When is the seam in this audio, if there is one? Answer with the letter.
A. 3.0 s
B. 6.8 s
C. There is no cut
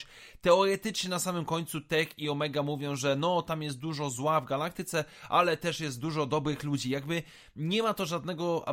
C